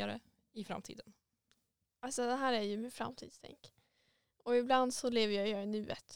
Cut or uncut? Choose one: uncut